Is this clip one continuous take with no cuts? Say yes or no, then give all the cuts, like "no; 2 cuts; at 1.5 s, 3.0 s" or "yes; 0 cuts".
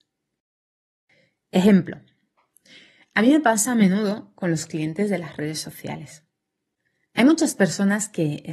yes; 0 cuts